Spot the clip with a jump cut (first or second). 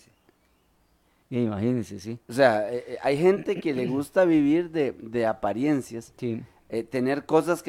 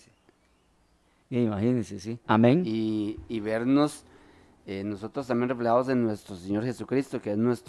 second